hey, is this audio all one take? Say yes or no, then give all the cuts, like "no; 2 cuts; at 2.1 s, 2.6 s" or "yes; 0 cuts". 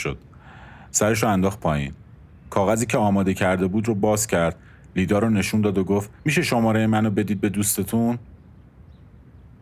no; 1 cut; at 6.2 s